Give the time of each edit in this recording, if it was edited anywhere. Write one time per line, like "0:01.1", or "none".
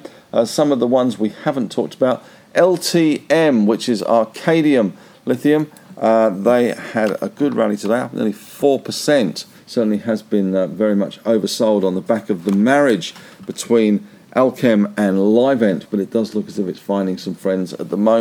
0:09.6
0:15.9